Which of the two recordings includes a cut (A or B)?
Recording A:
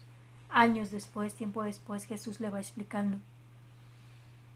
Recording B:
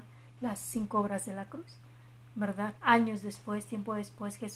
B